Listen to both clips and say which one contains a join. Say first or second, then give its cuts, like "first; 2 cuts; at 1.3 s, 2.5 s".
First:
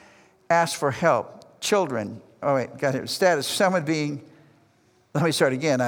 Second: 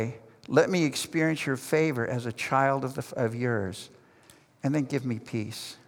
first; 1 cut; at 2.4 s